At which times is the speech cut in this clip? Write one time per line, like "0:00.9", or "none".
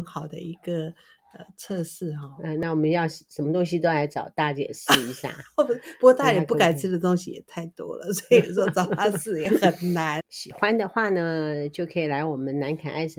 0:10.2